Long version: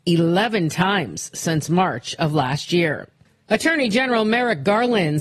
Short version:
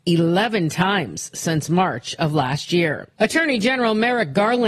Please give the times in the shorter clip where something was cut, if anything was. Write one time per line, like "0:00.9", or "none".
0:03.1